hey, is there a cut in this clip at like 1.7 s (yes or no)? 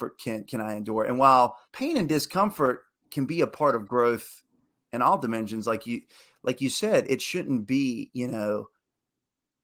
yes